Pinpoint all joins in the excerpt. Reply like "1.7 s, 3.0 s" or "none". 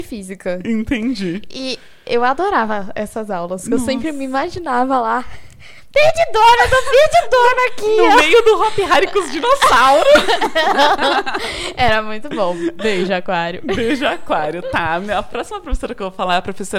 none